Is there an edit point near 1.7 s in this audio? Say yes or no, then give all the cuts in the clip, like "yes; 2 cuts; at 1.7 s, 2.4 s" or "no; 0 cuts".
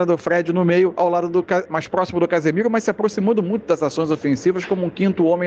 yes; 1 cut; at 1.7 s